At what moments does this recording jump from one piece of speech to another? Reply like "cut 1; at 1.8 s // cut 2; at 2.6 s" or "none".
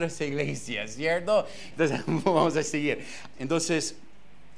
cut 1; at 1.7 s // cut 2; at 3.3 s